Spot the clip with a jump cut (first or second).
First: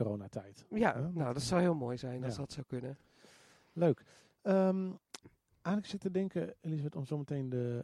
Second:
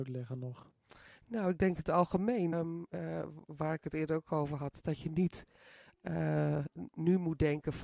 second